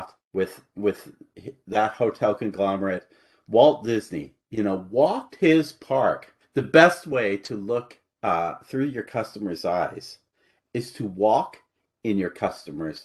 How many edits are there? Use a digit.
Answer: 1